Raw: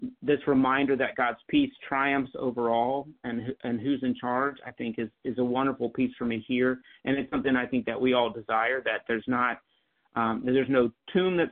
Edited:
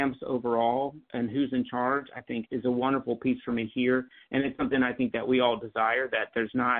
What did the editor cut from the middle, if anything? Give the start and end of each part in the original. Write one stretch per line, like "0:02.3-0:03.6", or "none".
0:03.2-0:03.6
0:05.0-0:05.2